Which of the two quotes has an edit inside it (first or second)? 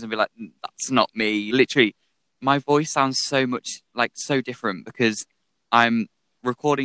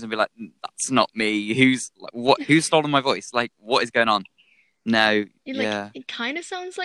first